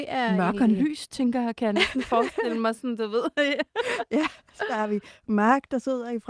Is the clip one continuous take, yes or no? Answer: yes